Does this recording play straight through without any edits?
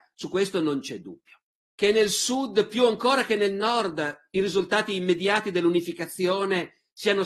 no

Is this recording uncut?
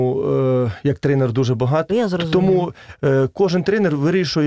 no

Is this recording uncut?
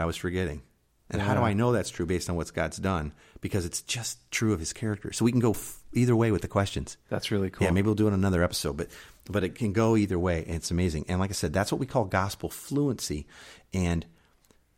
yes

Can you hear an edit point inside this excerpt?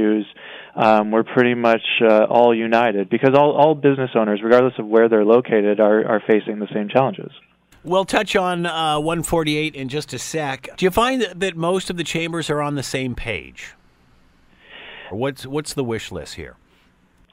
yes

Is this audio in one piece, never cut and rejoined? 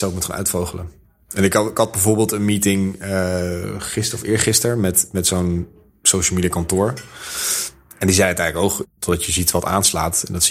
no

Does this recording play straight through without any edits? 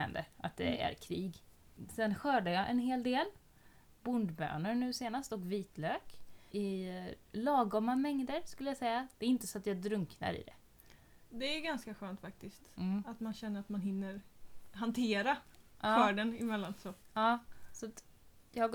yes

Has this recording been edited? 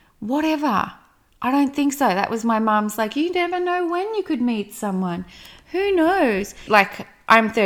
yes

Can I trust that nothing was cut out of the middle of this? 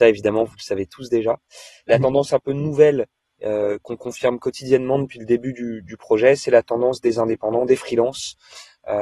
yes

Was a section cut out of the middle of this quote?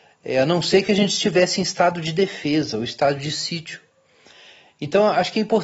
no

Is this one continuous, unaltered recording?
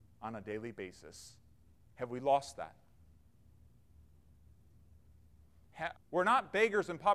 no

